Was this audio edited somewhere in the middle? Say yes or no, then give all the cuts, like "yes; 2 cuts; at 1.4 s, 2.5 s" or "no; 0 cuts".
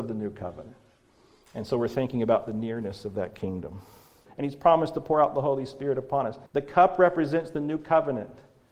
yes; 3 cuts; at 1.3 s, 4.3 s, 6.5 s